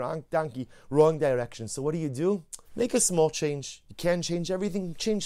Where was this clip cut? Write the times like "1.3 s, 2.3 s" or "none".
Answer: 2.6 s